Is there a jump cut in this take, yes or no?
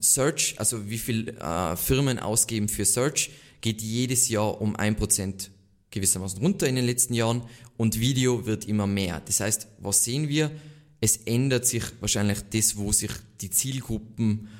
no